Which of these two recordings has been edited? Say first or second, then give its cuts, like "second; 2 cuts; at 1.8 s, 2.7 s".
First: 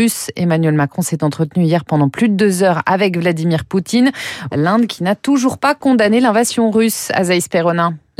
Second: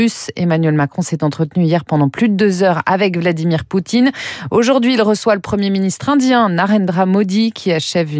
first; 1 cut; at 4.5 s